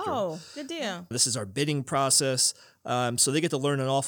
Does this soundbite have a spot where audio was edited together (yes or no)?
yes